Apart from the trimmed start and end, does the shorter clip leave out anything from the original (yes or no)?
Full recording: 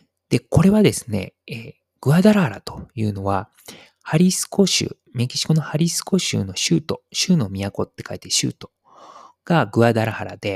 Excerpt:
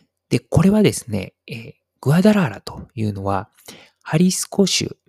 no